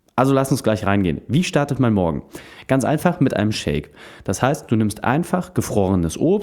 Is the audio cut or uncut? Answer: uncut